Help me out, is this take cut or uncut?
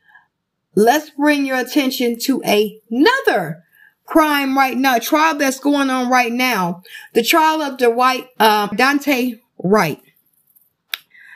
cut